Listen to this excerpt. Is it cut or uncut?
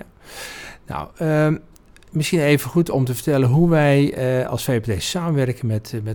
uncut